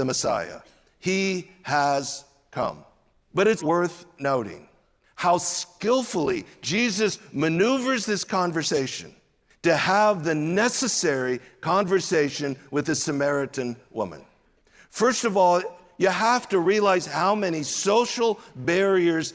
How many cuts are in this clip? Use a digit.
1